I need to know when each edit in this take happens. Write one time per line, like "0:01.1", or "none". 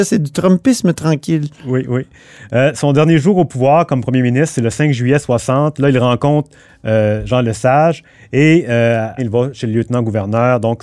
0:09.2